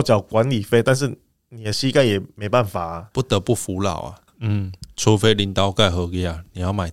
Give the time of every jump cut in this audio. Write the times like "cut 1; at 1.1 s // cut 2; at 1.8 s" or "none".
cut 1; at 3.1 s // cut 2; at 4.3 s